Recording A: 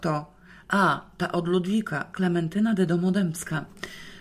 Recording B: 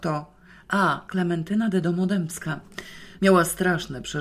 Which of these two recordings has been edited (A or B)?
B